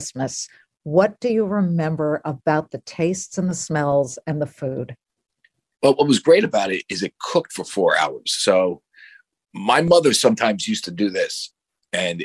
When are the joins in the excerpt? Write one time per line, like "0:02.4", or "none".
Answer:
none